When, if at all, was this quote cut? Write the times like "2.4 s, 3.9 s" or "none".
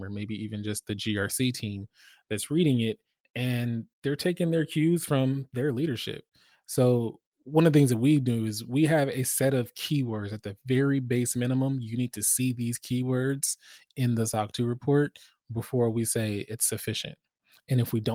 none